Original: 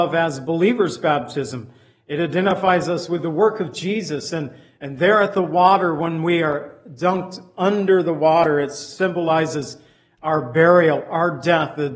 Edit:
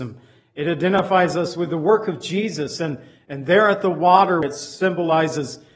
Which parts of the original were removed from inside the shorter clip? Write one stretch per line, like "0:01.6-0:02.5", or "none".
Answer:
0:05.9-0:08.6